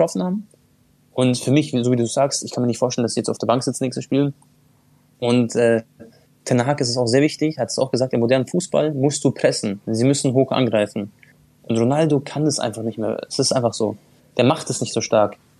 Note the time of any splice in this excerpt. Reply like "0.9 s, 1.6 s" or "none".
none